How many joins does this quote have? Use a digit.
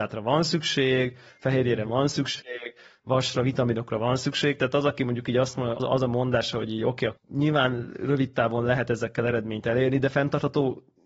2